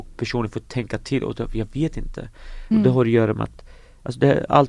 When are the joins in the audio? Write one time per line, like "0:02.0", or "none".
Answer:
0:02.7